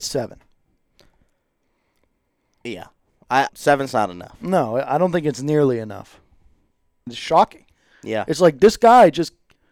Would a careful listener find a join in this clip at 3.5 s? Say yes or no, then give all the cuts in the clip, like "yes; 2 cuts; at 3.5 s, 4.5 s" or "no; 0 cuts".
yes; 2 cuts; at 3.5 s, 7.1 s